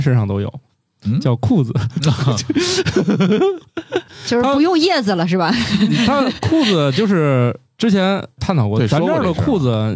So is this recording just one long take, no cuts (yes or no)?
yes